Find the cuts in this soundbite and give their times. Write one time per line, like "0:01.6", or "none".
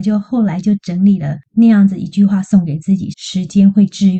0:01.5
0:03.1